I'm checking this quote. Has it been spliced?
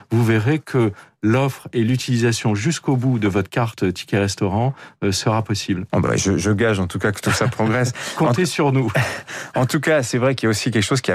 no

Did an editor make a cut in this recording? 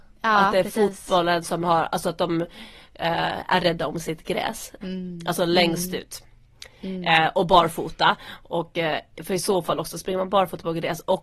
yes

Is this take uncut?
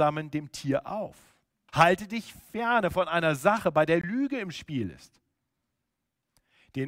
no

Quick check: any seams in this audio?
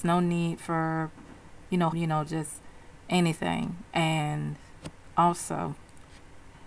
yes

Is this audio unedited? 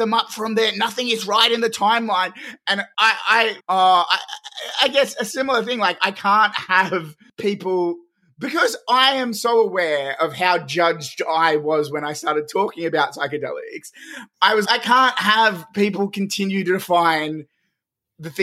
no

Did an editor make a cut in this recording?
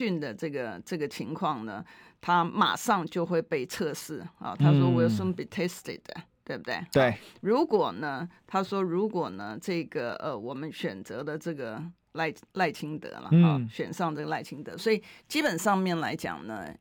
no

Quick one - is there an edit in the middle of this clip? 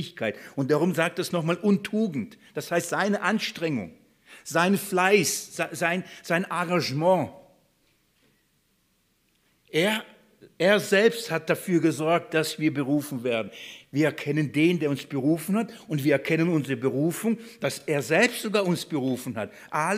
no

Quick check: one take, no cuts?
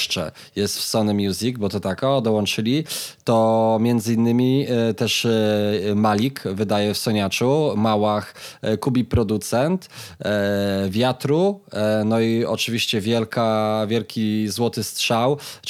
yes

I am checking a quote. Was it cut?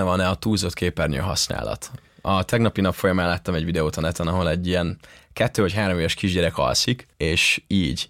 yes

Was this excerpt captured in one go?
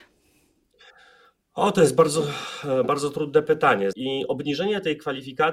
no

